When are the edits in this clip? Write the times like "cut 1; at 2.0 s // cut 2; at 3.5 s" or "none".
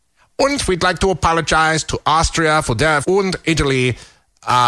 cut 1; at 3.0 s